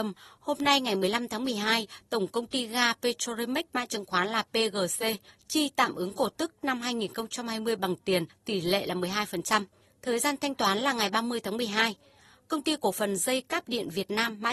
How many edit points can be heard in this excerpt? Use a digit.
0